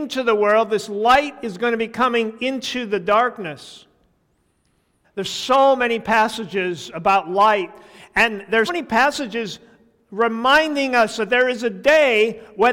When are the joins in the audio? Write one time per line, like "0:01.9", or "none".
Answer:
0:05.0
0:08.7